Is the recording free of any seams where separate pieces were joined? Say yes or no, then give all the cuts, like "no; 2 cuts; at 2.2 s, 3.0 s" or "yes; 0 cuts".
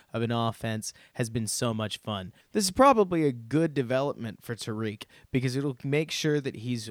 no; 1 cut; at 2.4 s